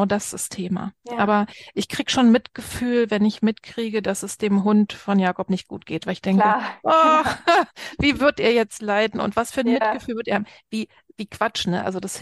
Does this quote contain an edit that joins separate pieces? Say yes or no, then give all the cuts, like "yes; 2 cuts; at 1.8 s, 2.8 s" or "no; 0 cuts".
yes; 1 cut; at 1.0 s